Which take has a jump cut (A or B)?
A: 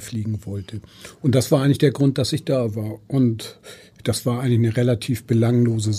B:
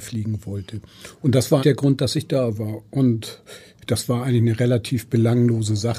B